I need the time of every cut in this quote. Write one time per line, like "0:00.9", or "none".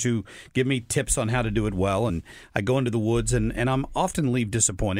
none